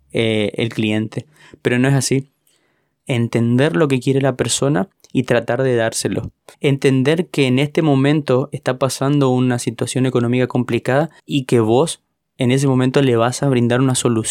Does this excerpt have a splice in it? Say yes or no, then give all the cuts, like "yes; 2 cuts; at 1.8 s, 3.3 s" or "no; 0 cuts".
yes; 3 cuts; at 3.0 s, 6.5 s, 11.2 s